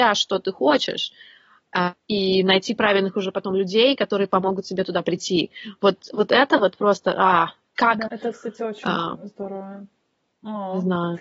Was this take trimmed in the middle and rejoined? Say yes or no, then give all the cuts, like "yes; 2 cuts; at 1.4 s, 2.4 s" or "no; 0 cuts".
yes; 2 cuts; at 2.0 s, 8.1 s